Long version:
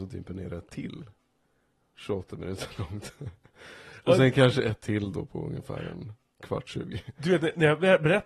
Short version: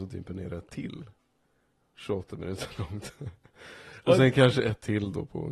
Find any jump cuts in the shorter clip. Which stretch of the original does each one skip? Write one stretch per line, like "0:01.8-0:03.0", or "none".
none